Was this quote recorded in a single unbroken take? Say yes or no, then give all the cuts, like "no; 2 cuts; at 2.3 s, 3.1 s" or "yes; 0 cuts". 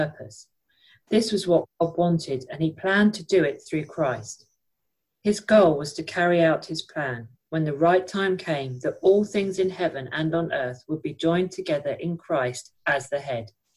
yes; 0 cuts